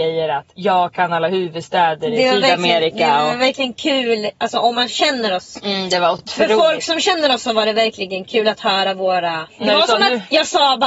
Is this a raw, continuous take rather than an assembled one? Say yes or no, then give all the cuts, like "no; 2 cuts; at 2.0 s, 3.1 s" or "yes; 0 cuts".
yes; 0 cuts